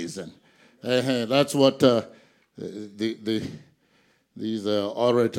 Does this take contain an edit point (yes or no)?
no